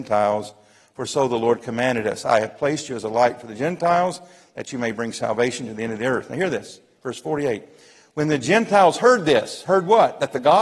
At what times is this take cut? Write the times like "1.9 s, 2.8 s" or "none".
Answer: none